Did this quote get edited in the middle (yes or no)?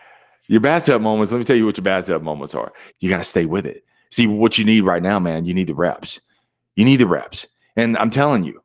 yes